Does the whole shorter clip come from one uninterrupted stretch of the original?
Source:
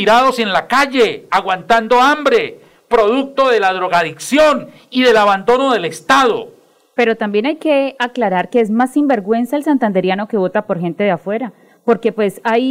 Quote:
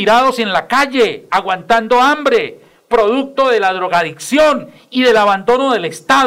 yes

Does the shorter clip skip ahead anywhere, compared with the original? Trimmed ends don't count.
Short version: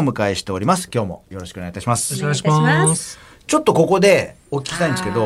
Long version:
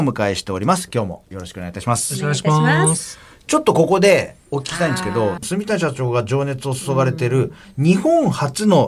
no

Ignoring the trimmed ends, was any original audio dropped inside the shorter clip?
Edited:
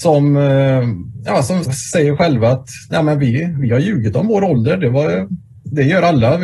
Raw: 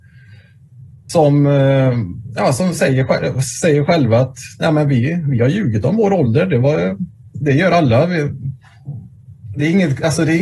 yes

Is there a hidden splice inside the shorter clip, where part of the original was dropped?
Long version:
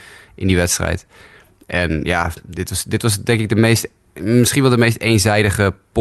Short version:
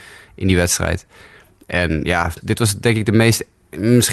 yes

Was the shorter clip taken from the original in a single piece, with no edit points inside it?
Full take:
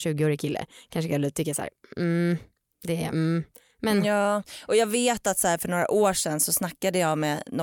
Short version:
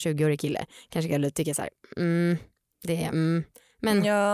yes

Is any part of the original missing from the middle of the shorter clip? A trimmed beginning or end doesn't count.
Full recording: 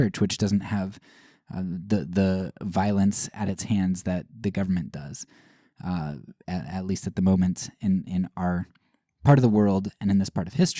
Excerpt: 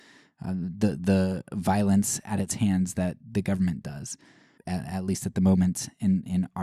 yes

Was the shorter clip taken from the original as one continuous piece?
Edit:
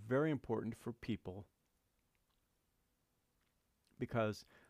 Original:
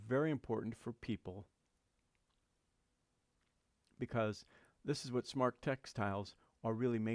yes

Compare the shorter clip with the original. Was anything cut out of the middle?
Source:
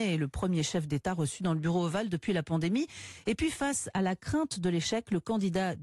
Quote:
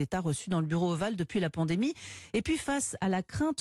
no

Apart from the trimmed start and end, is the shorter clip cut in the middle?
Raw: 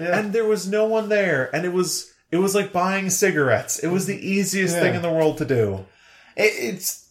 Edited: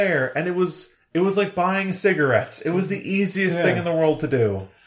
no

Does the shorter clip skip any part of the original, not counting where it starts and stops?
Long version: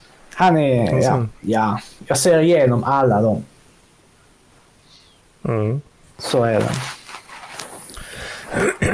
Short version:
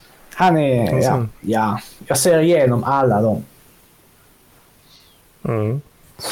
no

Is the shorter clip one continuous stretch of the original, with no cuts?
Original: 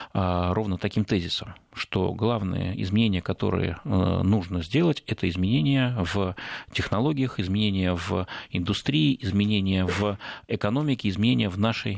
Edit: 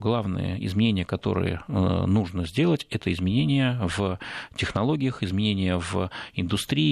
yes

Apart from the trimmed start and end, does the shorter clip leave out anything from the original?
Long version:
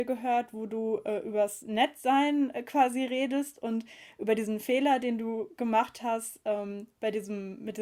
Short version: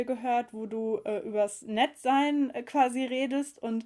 no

